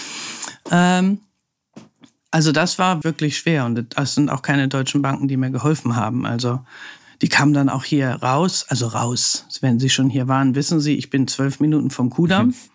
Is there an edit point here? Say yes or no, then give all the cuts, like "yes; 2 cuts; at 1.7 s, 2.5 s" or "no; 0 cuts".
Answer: yes; 1 cut; at 3.0 s